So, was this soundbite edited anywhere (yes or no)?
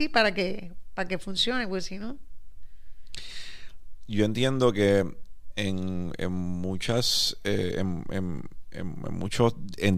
no